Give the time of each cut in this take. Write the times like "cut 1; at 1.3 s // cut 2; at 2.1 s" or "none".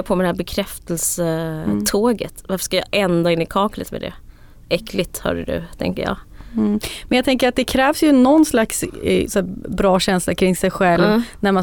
none